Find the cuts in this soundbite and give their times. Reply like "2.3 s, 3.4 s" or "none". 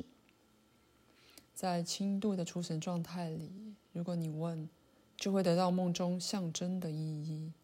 1.4 s